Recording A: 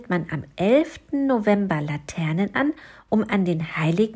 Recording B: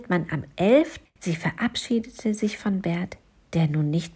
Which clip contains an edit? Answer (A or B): B